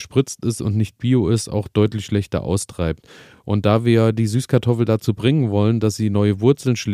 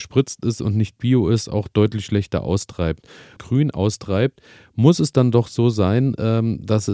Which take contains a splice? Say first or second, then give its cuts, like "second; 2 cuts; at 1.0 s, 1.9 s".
second; 1 cut; at 3.4 s